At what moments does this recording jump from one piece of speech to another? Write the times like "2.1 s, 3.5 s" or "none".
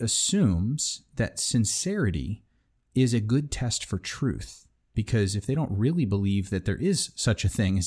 4.9 s